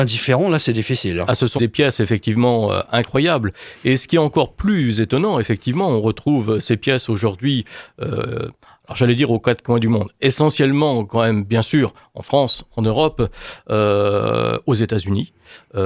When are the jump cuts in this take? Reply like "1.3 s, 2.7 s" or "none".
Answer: 1.6 s